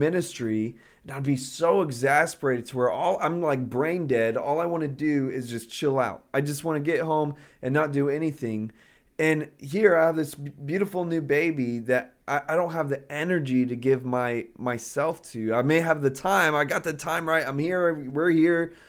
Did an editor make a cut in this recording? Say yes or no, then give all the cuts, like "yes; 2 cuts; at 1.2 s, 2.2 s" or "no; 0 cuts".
no; 0 cuts